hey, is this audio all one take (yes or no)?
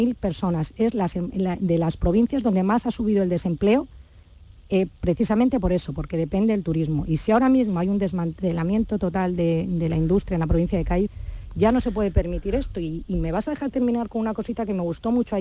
yes